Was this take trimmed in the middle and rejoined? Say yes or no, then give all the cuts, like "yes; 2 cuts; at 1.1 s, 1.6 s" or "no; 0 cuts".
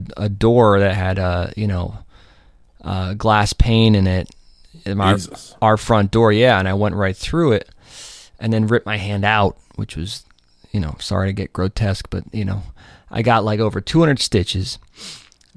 no; 0 cuts